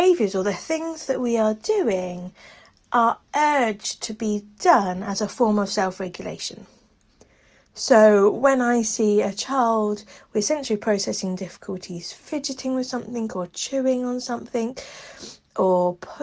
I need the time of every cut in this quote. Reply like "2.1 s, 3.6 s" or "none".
none